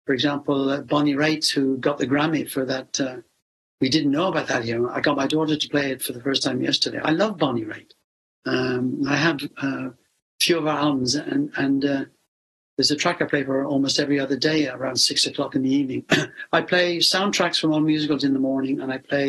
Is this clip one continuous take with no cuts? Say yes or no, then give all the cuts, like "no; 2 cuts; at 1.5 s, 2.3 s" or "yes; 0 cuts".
yes; 0 cuts